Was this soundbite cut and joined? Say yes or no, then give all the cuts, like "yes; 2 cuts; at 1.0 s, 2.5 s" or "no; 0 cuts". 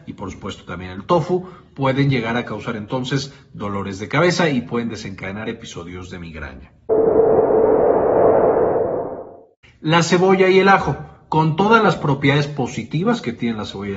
no; 0 cuts